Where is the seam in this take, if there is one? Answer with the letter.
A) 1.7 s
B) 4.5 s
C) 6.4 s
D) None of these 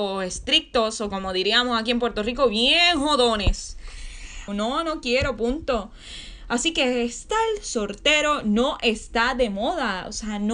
B